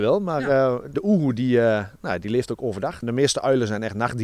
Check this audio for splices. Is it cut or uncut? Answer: cut